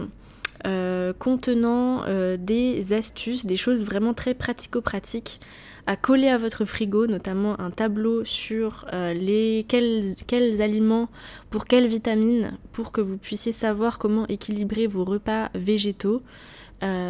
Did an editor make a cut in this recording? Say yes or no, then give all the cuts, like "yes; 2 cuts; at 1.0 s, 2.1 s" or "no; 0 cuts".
no; 0 cuts